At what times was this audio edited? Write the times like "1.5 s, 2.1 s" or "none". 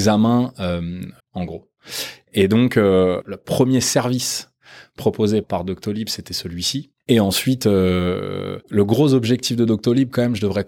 1.2 s, 8.6 s